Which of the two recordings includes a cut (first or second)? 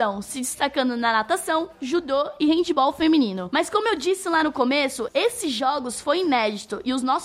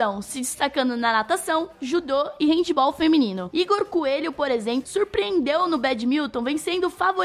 second